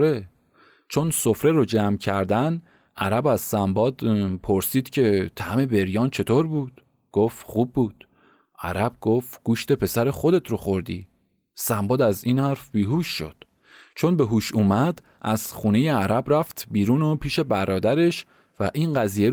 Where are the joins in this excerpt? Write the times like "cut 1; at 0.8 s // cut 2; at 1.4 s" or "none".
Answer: none